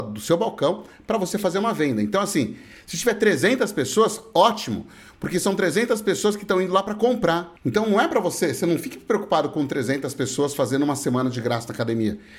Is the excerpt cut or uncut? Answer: cut